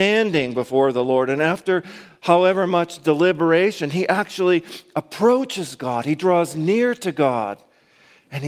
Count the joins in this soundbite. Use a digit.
0